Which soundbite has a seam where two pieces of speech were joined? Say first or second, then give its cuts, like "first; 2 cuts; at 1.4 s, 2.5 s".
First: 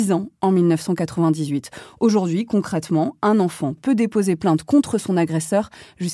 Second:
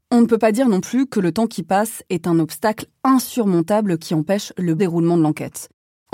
second; 1 cut; at 4.8 s